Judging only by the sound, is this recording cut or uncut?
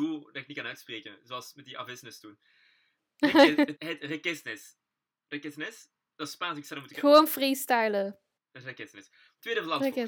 cut